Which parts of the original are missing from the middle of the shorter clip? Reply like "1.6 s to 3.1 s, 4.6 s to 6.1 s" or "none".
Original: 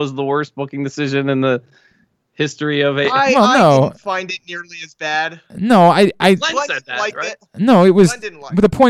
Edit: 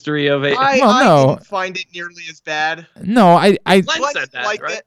none